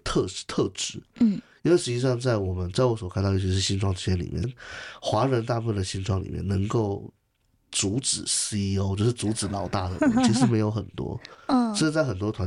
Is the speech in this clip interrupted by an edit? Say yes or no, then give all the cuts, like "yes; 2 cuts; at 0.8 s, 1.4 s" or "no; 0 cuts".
yes; 1 cut; at 4.4 s